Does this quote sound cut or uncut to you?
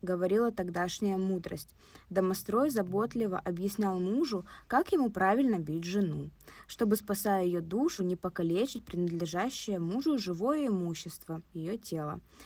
uncut